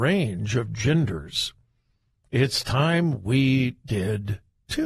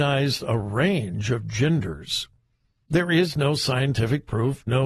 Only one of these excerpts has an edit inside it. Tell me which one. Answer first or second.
second